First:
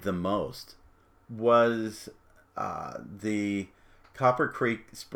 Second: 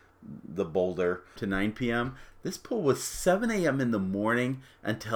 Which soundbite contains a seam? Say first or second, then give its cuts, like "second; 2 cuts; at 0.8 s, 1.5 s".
second; 1 cut; at 1.4 s